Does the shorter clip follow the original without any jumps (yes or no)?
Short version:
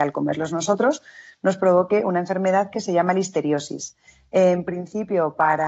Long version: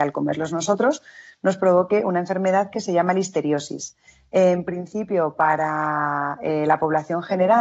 yes